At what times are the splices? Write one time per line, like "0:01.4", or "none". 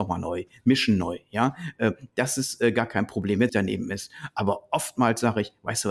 0:03.5